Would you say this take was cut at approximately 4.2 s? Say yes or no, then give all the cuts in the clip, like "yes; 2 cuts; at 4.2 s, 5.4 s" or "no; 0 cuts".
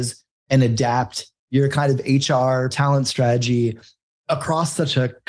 no; 2 cuts; at 1.4 s, 2.7 s